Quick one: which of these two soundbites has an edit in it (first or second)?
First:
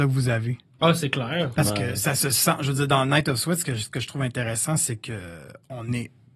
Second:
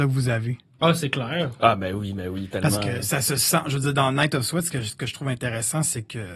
first